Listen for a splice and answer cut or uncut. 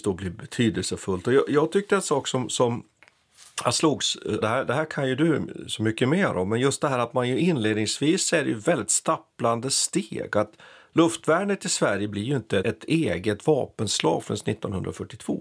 cut